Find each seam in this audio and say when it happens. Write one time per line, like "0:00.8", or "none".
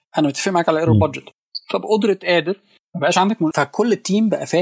0:03.5